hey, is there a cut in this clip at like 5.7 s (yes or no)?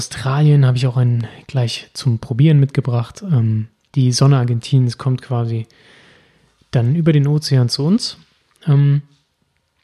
no